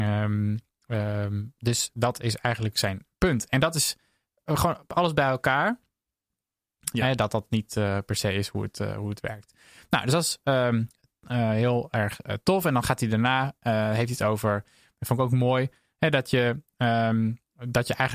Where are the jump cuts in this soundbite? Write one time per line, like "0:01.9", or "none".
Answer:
0:06.9